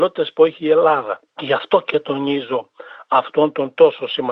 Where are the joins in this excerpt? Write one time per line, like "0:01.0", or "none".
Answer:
0:01.3